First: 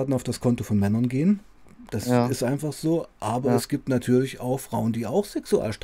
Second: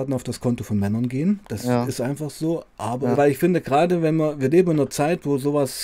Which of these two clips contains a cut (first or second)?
second